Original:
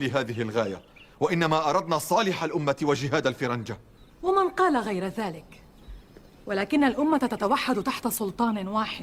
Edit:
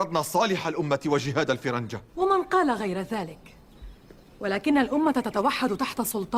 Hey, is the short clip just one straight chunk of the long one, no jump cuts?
no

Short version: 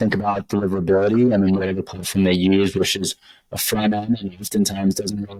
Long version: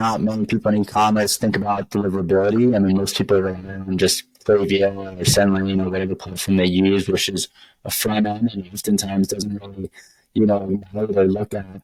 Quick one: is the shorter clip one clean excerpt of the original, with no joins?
no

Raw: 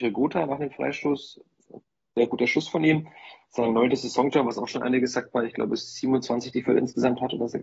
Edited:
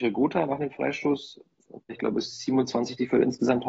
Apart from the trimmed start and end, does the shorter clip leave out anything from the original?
yes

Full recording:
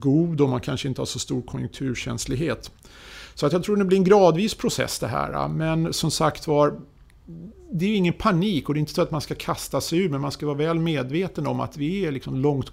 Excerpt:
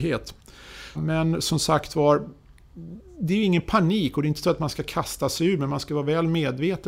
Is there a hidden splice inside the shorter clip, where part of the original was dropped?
yes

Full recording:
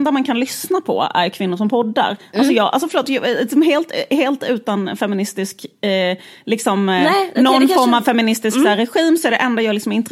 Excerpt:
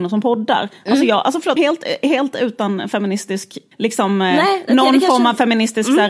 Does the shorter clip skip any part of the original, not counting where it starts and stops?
yes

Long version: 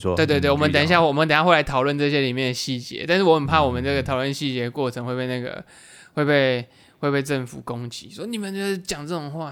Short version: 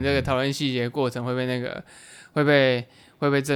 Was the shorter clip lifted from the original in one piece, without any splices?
yes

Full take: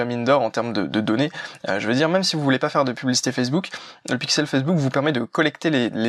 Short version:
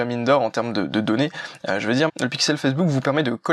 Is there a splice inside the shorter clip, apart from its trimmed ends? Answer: yes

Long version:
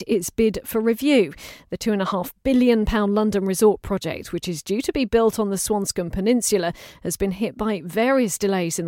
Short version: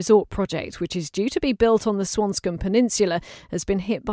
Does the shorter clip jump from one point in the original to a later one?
no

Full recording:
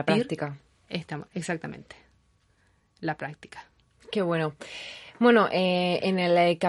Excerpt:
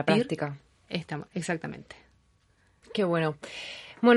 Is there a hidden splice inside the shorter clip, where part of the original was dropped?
yes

